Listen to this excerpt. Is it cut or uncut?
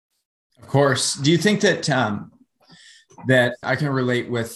cut